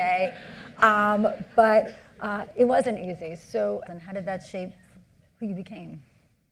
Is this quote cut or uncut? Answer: cut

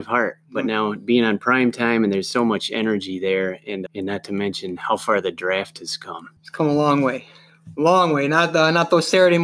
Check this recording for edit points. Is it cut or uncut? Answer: cut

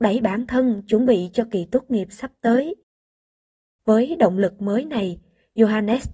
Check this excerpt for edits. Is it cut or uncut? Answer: uncut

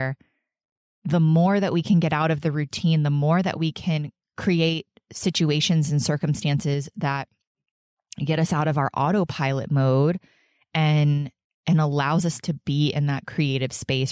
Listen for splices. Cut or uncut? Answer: cut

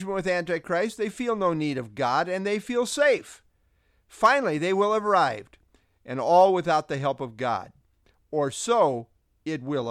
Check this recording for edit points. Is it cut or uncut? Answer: uncut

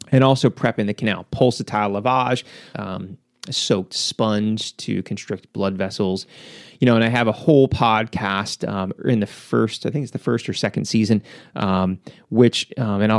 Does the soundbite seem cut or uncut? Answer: cut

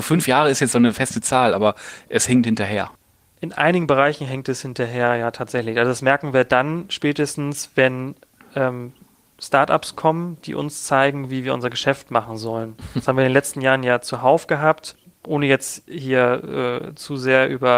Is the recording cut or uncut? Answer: uncut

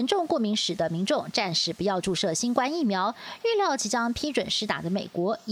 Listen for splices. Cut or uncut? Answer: uncut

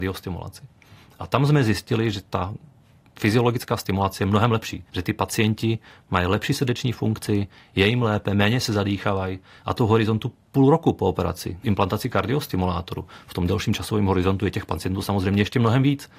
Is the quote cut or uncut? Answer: cut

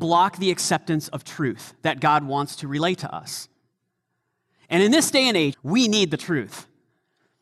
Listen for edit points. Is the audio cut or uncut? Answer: cut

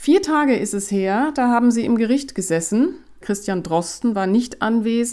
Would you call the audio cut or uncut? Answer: cut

